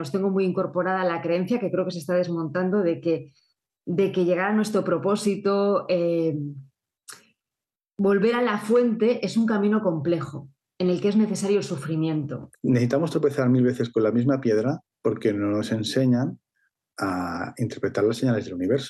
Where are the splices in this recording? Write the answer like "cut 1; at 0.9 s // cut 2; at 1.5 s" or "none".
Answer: cut 1; at 12.5 s